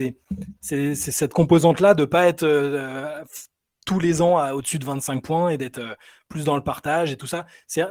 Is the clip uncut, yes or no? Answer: yes